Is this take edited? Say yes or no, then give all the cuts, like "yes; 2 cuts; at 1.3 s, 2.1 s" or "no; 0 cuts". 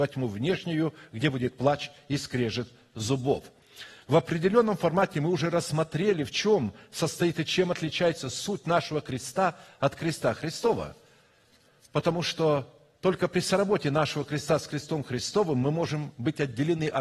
no; 0 cuts